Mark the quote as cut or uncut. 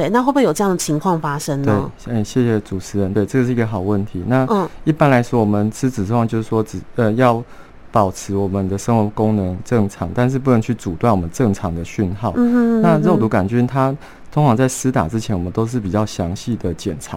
uncut